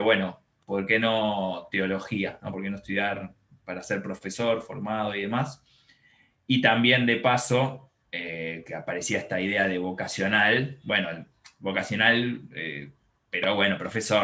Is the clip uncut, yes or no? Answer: yes